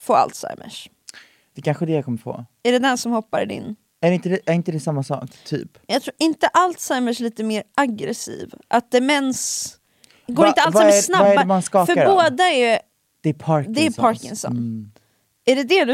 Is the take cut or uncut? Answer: uncut